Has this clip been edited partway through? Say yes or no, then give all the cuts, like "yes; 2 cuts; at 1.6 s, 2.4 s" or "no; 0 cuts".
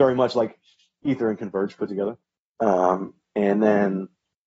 yes; 1 cut; at 2.5 s